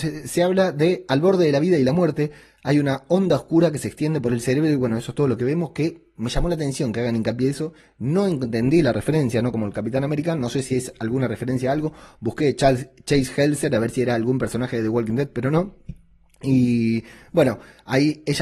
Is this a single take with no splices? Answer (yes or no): yes